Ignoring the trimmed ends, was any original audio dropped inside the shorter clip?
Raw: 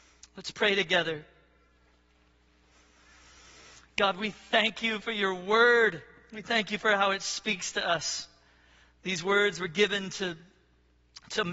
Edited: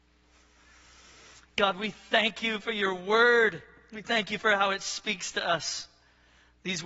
no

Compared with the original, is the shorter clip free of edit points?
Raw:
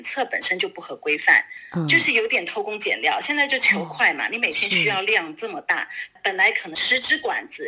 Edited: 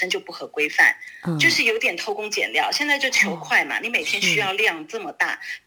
yes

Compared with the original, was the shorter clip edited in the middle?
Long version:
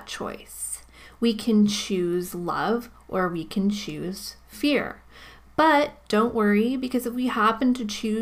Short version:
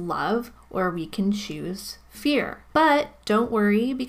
yes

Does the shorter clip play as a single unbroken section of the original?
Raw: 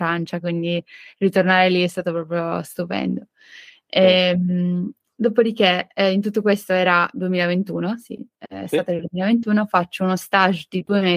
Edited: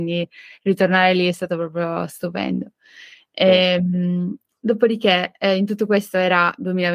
yes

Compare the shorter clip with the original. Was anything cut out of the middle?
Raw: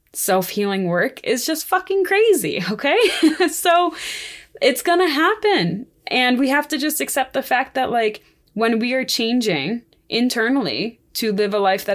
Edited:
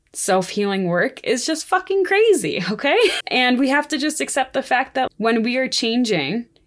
yes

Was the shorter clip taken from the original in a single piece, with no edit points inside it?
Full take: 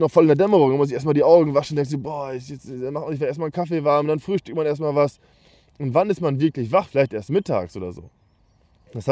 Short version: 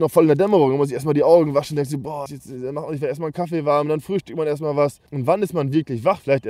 no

